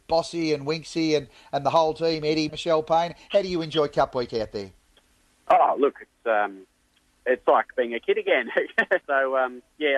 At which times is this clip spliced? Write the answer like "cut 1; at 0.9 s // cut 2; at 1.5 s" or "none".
cut 1; at 2.5 s // cut 2; at 9.0 s